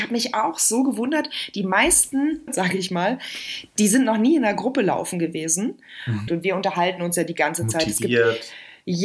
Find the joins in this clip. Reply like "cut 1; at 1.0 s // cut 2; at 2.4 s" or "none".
cut 1; at 2.5 s // cut 2; at 6.3 s